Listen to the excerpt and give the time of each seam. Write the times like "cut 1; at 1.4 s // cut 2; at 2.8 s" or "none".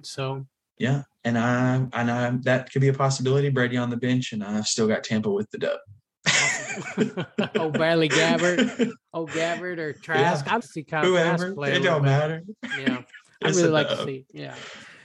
cut 1; at 10.6 s